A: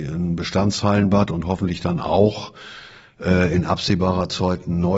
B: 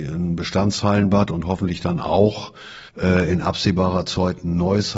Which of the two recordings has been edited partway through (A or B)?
B